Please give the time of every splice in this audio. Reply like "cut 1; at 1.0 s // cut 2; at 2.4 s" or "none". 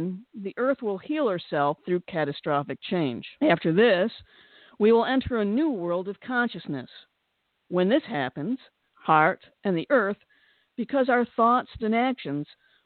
cut 1; at 8.9 s // cut 2; at 11.8 s